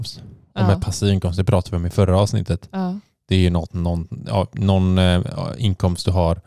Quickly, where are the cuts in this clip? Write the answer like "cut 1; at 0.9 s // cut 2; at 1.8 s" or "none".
none